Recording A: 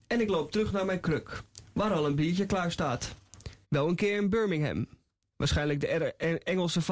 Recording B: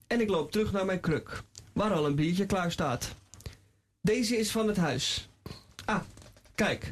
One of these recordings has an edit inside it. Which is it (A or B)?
A